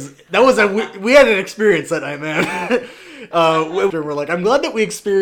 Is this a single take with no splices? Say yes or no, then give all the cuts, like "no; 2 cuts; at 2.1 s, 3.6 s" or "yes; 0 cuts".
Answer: no; 1 cut; at 3.9 s